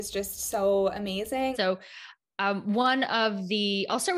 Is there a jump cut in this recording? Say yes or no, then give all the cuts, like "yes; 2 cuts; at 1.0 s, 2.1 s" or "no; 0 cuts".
yes; 1 cut; at 1.5 s